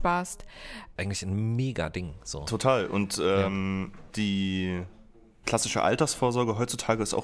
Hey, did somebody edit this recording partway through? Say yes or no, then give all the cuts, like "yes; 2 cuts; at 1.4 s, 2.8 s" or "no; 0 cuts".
yes; 1 cut; at 1.0 s